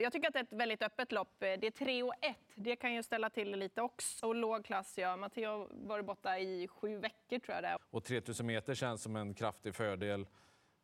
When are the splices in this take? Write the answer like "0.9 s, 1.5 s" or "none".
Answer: 4.2 s, 7.8 s

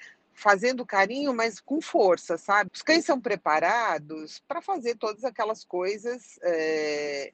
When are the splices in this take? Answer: 2.7 s

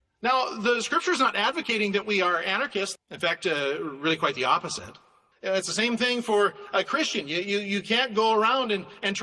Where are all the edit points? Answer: 3.0 s, 5.3 s

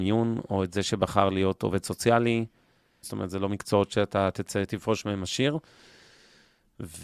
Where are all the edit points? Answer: 3.0 s

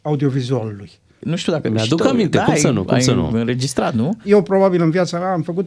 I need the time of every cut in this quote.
1.2 s, 4.2 s

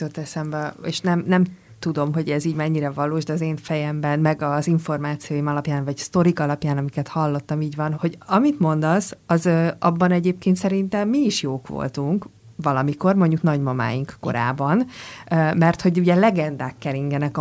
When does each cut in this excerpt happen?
7.9 s

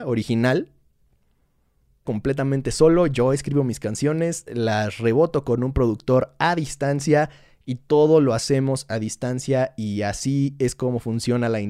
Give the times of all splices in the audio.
2.0 s

